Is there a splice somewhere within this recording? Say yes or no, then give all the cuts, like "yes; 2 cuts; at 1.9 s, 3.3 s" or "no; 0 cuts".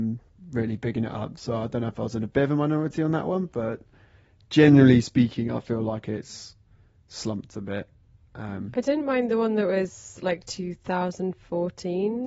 no; 0 cuts